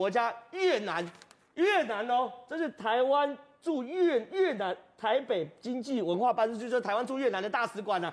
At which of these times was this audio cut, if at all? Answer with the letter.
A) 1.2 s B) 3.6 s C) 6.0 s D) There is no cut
D